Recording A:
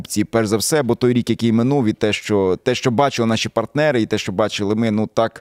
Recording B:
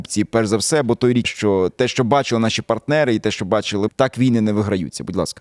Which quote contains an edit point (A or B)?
B